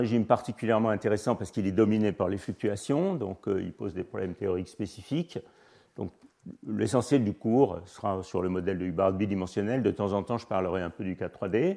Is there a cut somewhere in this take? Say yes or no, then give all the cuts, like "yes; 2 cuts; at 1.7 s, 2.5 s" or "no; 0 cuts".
no; 0 cuts